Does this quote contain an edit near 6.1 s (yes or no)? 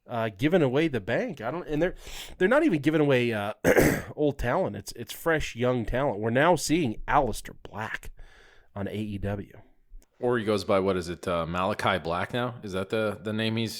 no